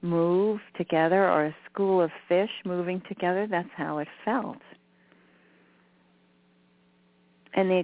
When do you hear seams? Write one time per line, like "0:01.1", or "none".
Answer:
none

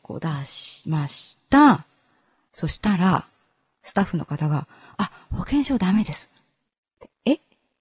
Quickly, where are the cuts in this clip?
none

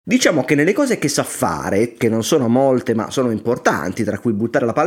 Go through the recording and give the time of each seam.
none

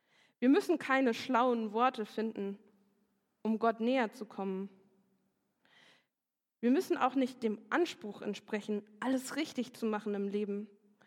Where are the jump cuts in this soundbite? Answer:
none

